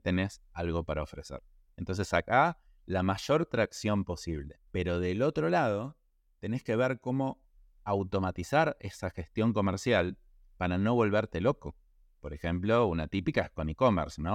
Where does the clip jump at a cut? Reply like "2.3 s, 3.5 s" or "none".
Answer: 4.7 s